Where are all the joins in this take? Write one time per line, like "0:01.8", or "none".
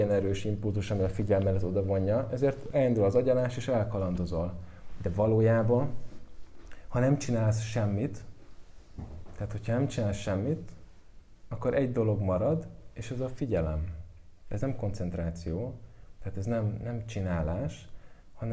none